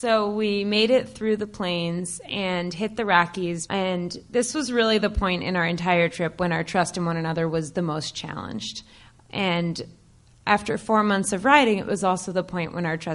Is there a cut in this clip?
yes; 1 cut; at 3.7 s

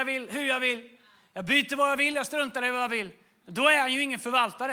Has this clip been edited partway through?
no; 0 cuts

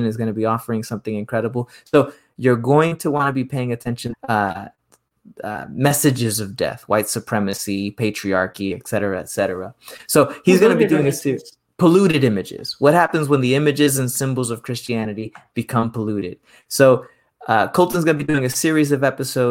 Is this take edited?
yes; 1 cut; at 4.1 s

